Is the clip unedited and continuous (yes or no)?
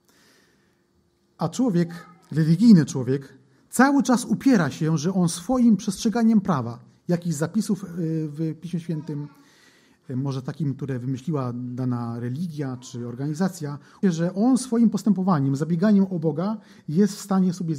no